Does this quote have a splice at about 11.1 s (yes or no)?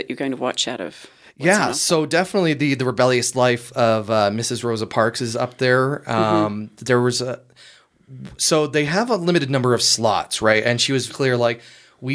yes